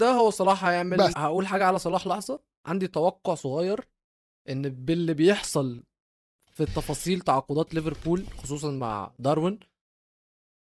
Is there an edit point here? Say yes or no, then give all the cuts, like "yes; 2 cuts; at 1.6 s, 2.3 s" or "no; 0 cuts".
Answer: yes; 1 cut; at 1.1 s